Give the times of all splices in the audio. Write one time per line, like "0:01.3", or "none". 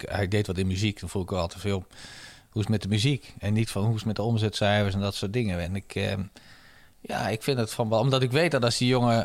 none